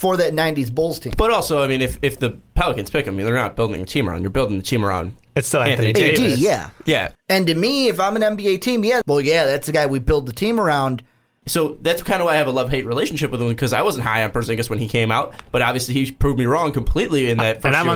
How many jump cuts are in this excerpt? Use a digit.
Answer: 3